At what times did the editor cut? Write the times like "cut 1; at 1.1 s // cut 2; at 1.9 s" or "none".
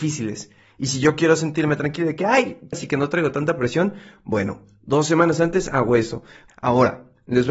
cut 1; at 2.7 s // cut 2; at 6.5 s